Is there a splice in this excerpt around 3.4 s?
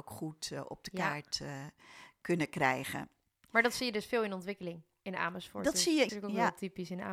no; 1 cut; at 6.1 s

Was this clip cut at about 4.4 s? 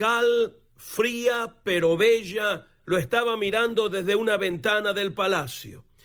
no; 1 cut; at 2.8 s

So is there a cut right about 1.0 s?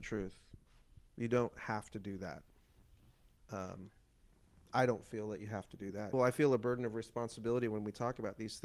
no; 1 cut; at 6.1 s

